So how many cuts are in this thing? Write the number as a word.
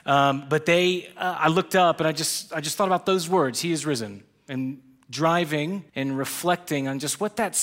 one